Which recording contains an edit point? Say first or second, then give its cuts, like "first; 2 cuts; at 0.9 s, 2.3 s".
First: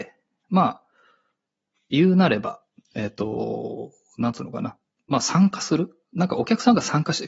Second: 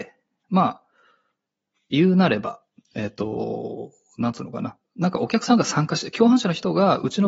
second; 1 cut; at 4.8 s